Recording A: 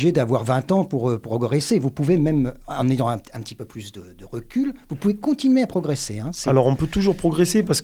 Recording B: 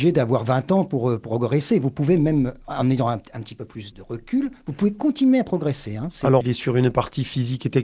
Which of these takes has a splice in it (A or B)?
B